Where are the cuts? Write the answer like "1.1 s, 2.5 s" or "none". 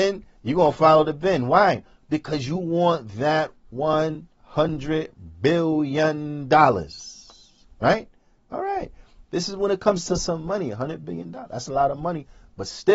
none